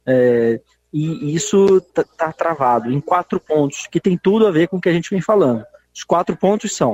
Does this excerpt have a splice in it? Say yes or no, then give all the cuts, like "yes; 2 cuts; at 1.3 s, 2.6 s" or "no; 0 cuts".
no; 0 cuts